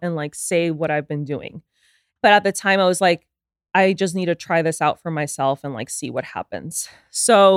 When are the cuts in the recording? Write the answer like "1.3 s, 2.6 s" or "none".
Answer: 2.2 s